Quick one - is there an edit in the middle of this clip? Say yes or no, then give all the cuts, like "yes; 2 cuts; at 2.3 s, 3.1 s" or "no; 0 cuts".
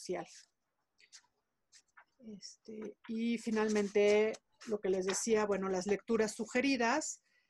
no; 0 cuts